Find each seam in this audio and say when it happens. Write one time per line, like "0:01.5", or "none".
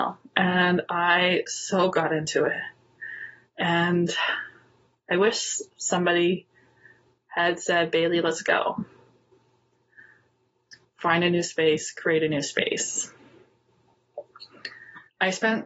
none